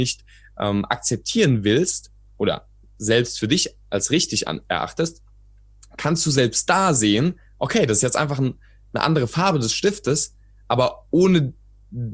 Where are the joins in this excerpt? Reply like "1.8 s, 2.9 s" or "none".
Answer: none